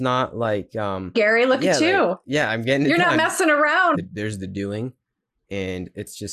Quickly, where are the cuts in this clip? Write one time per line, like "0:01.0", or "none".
0:01.1
0:03.9